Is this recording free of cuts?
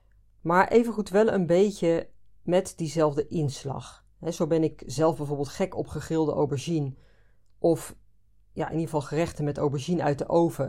yes; 0 cuts

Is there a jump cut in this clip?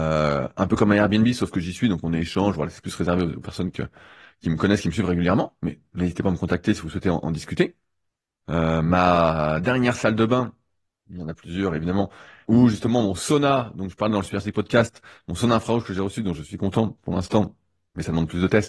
yes; 2 cuts; at 8.4 s, 12.4 s

